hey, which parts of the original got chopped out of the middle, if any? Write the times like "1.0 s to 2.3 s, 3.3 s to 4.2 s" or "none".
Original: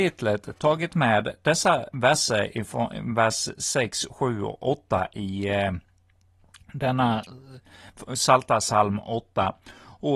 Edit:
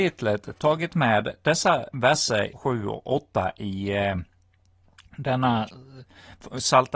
2.5 s to 4.1 s